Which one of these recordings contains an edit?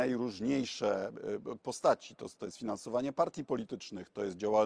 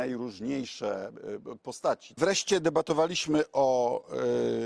second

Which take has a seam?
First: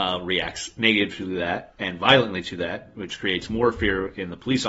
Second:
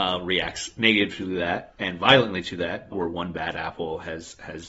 second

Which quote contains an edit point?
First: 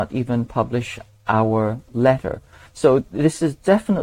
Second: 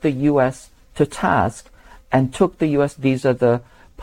second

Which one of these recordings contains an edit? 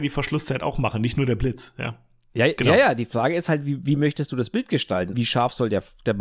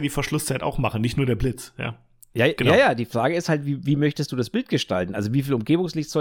first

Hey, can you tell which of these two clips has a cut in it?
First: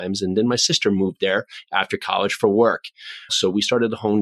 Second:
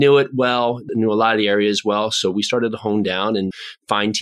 first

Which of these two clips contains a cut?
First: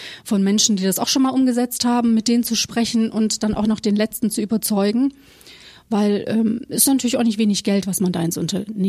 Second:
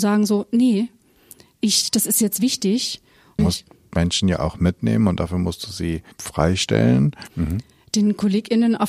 second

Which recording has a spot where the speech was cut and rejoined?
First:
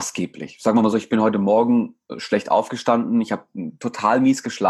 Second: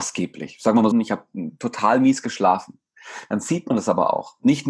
second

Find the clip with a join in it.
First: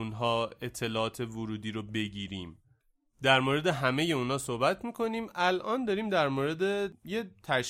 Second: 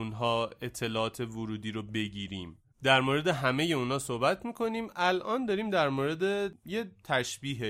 second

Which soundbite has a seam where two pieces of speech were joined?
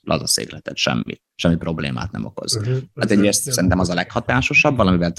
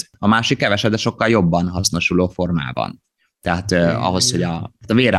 first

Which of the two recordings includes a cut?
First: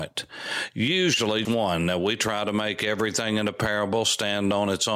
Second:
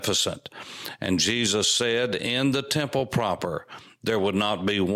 first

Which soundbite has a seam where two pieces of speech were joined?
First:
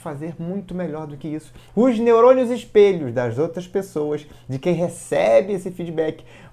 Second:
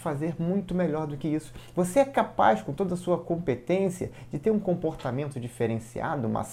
first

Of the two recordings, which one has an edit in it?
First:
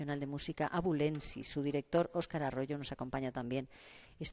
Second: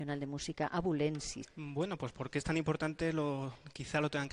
second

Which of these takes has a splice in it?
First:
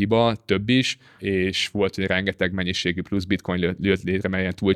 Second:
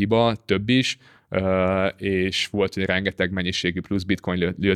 first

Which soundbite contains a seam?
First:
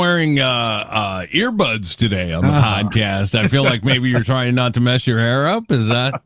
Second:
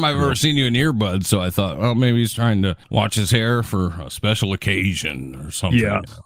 second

